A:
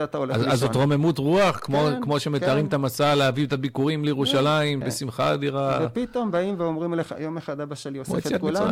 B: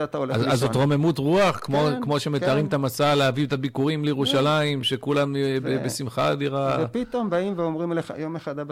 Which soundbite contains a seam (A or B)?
A